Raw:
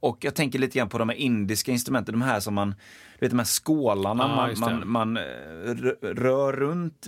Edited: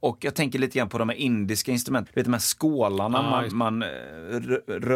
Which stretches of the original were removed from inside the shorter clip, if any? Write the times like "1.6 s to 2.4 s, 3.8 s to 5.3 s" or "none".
2.1 s to 3.1 s, 4.6 s to 4.8 s